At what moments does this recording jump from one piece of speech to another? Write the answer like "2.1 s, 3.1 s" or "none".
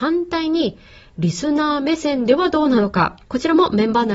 3.2 s